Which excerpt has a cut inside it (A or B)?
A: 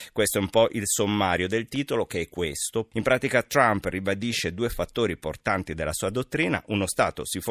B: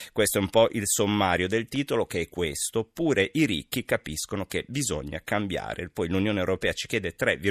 A